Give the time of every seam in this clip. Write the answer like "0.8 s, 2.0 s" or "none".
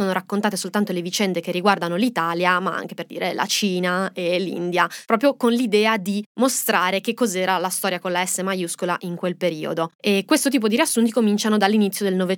none